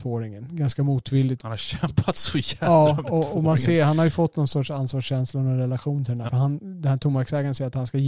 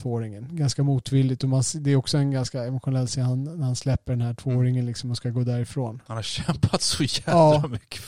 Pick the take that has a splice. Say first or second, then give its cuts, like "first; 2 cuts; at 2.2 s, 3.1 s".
first; 3 cuts; at 1.4 s, 3.0 s, 6.3 s